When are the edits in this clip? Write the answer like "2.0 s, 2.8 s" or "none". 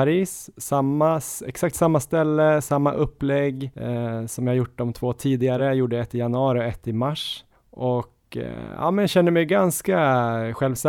none